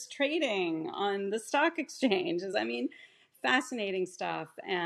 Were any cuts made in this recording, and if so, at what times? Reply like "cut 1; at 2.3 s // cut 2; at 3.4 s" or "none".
none